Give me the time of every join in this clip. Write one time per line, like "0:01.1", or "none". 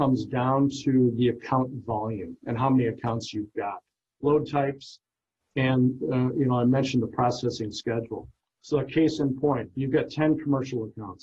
none